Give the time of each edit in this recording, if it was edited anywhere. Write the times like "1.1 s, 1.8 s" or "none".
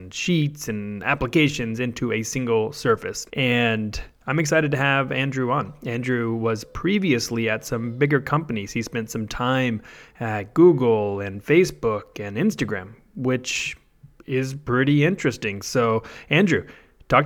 3.3 s

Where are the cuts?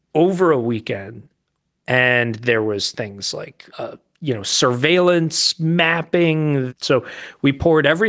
1.8 s, 3.7 s, 6.7 s

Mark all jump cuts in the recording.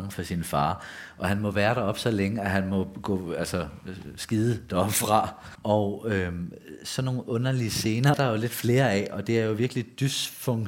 5.5 s, 8.1 s

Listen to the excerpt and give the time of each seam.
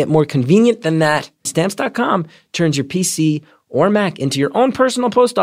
1.5 s

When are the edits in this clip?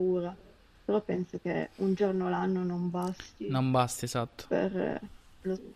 none

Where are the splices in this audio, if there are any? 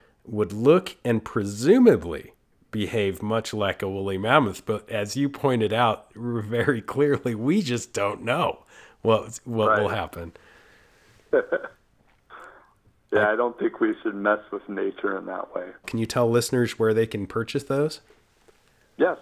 15.8 s

